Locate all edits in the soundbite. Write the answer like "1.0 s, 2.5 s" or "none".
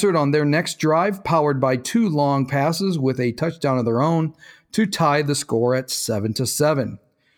none